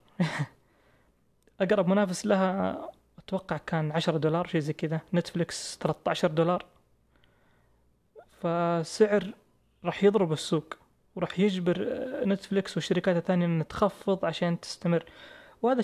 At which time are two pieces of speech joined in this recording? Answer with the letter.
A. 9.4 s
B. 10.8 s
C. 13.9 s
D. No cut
D